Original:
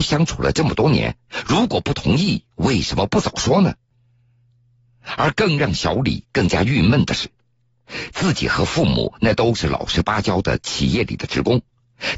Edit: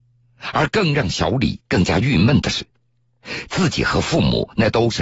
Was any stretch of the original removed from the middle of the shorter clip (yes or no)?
no